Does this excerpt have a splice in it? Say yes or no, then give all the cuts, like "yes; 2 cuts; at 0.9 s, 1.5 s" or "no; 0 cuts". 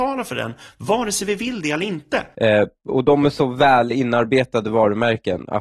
yes; 1 cut; at 2.3 s